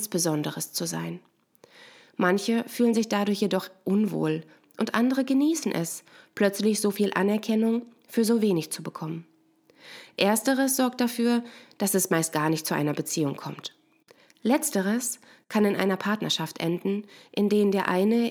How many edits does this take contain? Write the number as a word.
zero